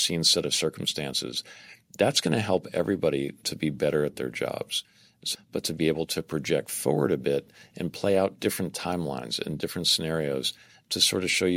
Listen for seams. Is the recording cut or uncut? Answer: cut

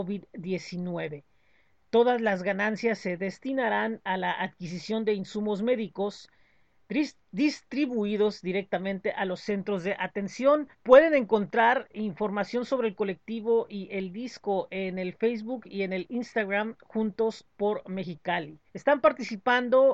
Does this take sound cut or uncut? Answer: cut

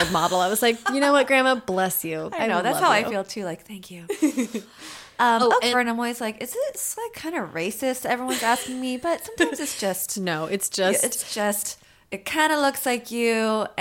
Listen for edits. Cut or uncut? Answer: cut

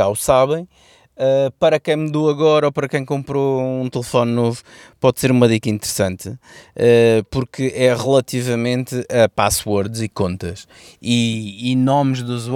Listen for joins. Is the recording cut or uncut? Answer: uncut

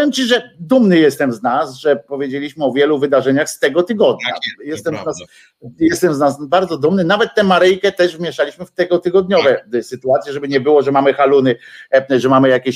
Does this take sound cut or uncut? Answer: uncut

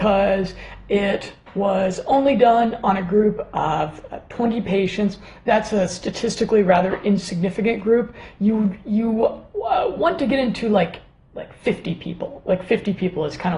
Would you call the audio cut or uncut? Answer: uncut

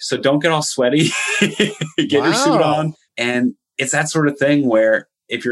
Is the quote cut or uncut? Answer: cut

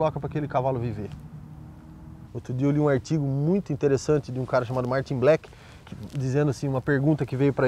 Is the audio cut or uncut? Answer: cut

